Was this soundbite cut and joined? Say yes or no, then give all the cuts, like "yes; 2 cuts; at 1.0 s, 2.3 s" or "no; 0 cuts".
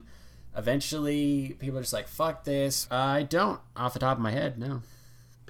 yes; 1 cut; at 2.9 s